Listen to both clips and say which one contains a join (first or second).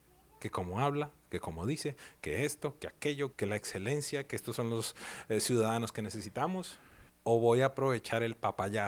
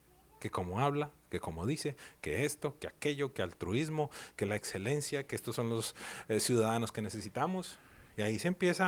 first